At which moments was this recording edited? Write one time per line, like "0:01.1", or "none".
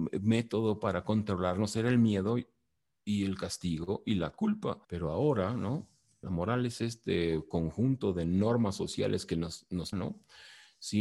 0:04.8
0:06.2
0:09.9